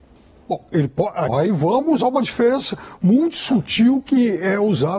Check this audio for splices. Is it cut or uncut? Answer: cut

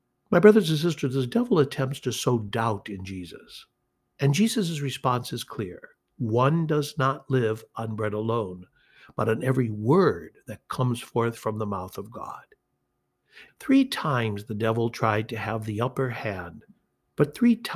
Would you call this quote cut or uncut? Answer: cut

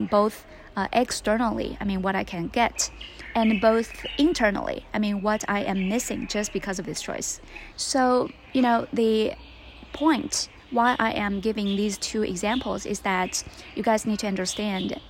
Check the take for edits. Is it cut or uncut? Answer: cut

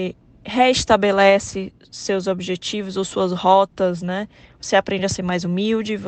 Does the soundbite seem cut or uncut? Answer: cut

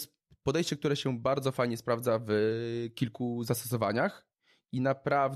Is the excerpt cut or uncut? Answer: uncut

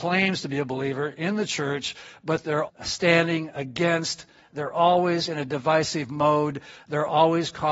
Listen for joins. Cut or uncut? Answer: cut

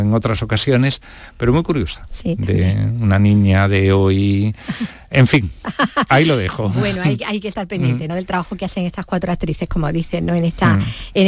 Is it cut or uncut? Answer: uncut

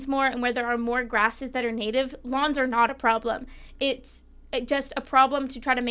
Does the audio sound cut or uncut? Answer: uncut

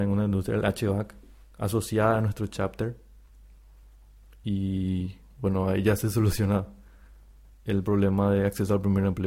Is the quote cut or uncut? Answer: uncut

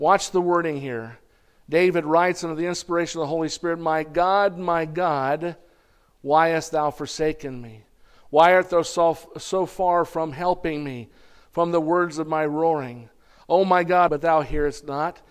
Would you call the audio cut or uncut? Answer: cut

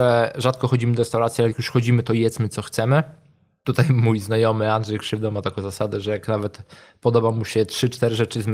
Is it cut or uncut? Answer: uncut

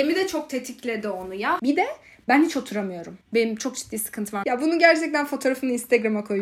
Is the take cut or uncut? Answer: cut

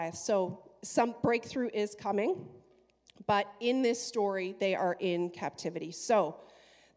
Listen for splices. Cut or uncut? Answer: uncut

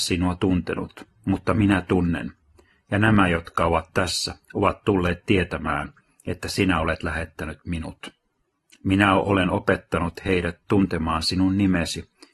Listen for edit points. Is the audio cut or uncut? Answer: uncut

